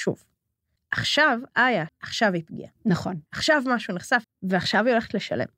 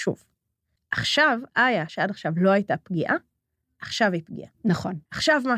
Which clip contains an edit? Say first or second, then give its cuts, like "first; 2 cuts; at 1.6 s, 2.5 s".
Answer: first; 2 cuts; at 1.9 s, 4.2 s